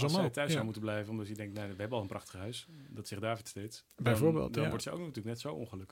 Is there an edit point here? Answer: no; 0 cuts

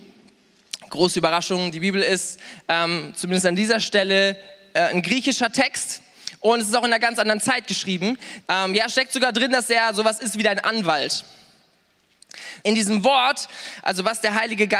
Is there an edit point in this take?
yes; 2 cuts; at 8.4 s, 12.6 s

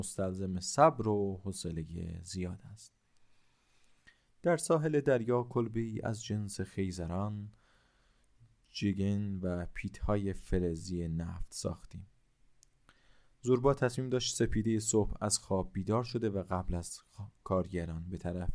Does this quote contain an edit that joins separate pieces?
no; 0 cuts

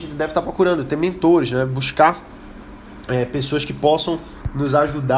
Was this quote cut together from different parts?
no; 0 cuts

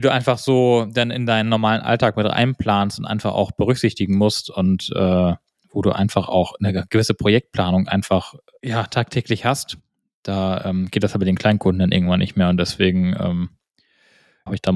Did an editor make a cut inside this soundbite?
no; 0 cuts

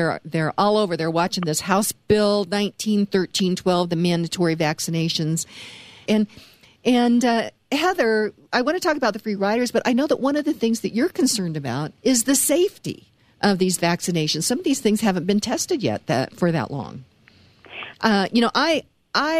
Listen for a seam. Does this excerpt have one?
yes; 3 cuts; at 6.1 s, 12.0 s, 17.9 s

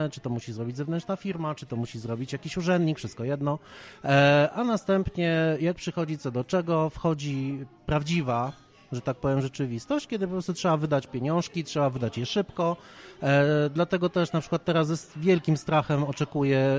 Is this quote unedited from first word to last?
yes; 0 cuts

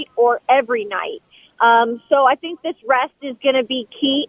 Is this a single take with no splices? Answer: yes; 0 cuts

